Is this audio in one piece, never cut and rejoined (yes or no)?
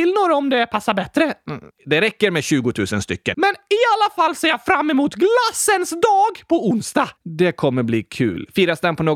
no